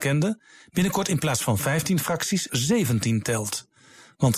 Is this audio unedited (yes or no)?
no